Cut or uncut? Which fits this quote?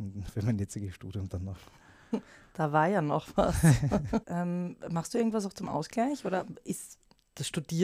cut